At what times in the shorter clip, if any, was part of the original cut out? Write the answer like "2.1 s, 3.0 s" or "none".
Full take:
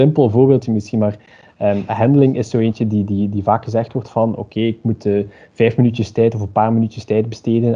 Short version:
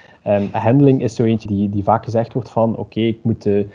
1.5 s